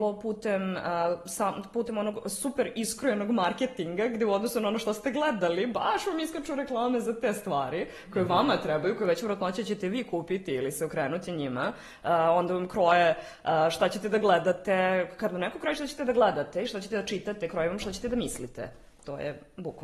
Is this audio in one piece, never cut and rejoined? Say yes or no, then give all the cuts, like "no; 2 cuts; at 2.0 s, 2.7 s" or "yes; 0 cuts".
yes; 0 cuts